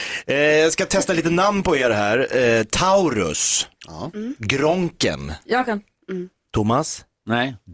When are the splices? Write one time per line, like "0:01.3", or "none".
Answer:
0:03.8
0:06.3